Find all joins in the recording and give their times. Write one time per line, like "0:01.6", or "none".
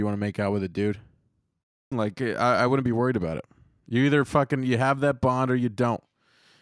0:01.9

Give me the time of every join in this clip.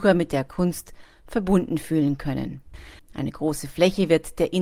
0:03.0

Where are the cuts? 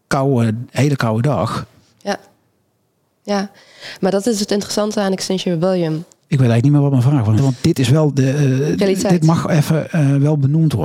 0:06.2
0:07.4

